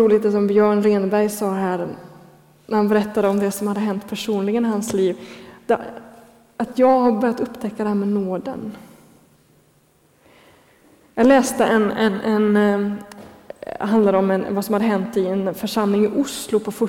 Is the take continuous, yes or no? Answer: yes